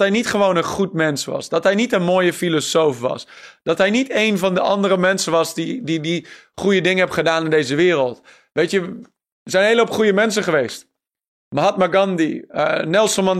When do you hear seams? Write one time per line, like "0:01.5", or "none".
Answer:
none